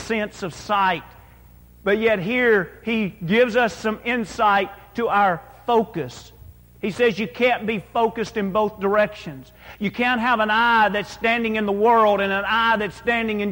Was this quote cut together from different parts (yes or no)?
no